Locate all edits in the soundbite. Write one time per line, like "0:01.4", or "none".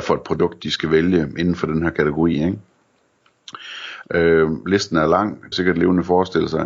0:04.0
0:05.5